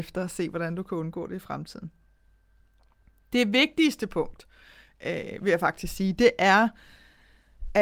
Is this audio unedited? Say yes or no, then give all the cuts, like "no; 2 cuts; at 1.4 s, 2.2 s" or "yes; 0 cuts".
yes; 0 cuts